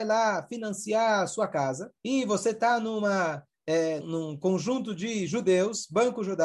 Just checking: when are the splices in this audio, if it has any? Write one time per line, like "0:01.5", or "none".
0:02.0
0:04.0

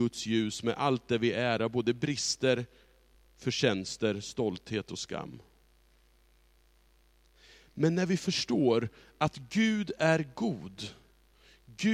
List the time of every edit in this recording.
none

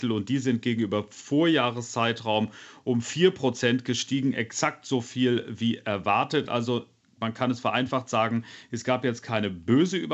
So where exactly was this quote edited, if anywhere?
none

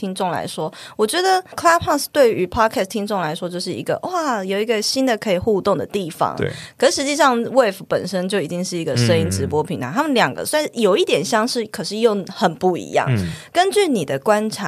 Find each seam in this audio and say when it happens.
none

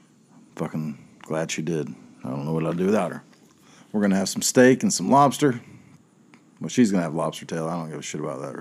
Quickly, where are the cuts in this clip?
0:03.8

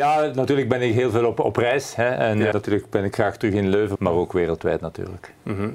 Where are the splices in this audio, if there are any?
0:02.5
0:04.0

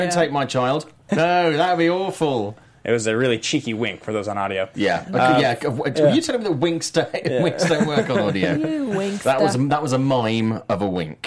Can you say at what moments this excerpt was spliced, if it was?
0:01.1

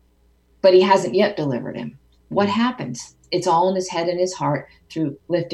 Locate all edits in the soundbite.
none

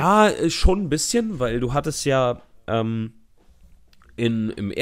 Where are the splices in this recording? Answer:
none

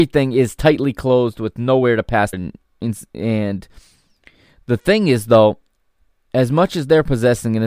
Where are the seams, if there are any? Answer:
0:02.3

